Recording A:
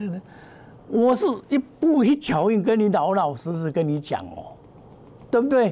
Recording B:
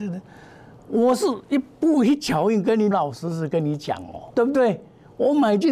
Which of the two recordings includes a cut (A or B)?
B